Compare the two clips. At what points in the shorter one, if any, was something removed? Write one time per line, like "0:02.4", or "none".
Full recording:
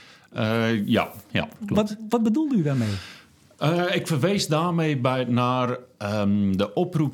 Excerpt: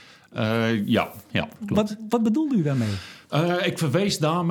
0:03.2